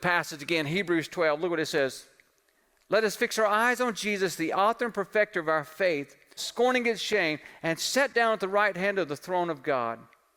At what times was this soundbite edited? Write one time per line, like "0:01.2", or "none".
0:06.4